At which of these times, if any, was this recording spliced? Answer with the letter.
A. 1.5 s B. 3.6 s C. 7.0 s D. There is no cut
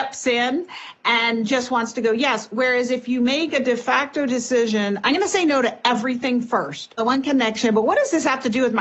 C